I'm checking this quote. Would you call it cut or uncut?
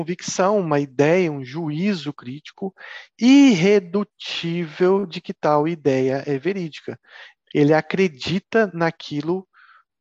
cut